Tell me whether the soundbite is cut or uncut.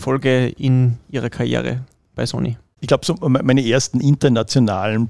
uncut